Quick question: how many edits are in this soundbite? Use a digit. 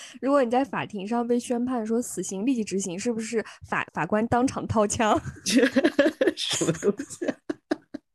1